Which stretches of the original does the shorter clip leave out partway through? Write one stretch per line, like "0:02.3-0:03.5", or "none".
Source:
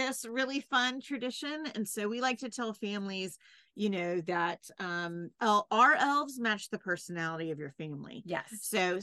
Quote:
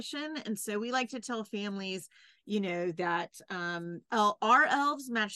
none